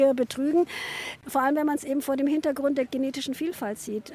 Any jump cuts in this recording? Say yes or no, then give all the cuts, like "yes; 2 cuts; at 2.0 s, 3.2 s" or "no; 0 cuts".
no; 0 cuts